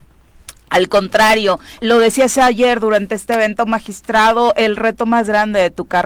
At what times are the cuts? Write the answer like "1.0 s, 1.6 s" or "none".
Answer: 1.8 s